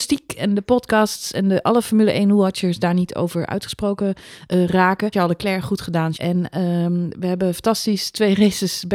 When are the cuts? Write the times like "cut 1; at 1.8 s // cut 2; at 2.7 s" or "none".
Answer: cut 1; at 5.1 s // cut 2; at 6.1 s